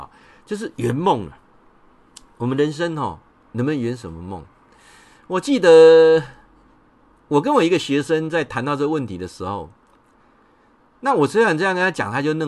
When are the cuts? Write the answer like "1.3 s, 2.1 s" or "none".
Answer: none